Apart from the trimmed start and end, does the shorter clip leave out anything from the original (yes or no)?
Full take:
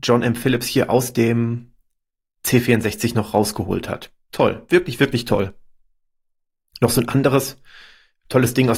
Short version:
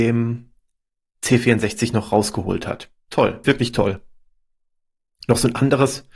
yes